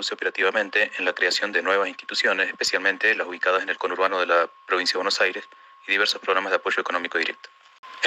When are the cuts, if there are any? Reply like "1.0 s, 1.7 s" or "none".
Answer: none